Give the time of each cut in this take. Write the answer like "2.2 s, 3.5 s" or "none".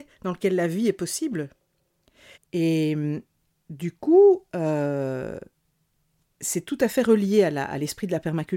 2.3 s